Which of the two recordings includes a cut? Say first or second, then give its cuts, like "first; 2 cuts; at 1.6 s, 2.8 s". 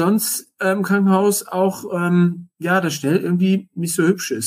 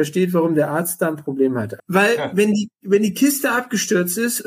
second; 1 cut; at 1.8 s